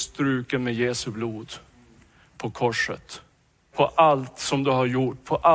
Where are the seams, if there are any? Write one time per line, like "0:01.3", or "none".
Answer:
0:03.7